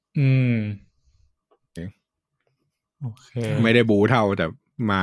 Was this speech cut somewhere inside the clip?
yes; 1 cut; at 1.8 s

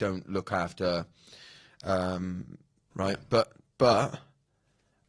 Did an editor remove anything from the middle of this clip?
yes; 1 cut; at 2.9 s

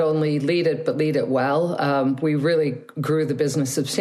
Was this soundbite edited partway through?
no; 0 cuts

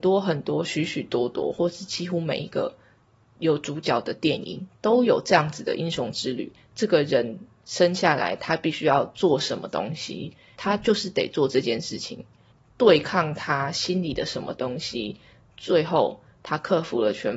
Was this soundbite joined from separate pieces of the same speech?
no; 0 cuts

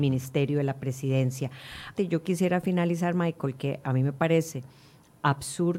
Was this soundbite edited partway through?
yes; 1 cut; at 2.0 s

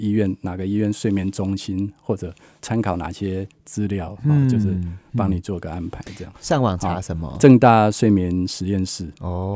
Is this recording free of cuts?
no; 2 cuts; at 2.6 s, 6.3 s

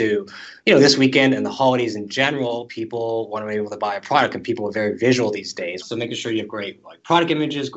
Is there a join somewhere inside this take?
yes; 1 cut; at 5.8 s

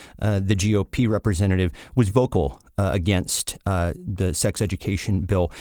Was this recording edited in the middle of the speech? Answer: yes; 1 cut; at 2.1 s

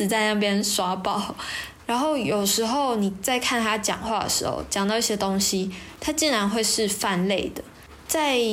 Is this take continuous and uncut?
no; 1 cut; at 1.8 s

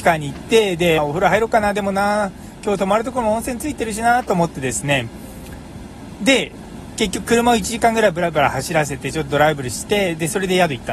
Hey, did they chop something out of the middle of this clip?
yes; 1 cut; at 1.0 s

